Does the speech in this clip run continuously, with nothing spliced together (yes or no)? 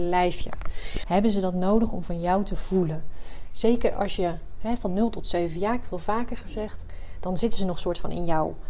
no